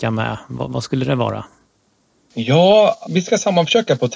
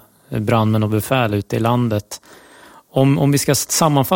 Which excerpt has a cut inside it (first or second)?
first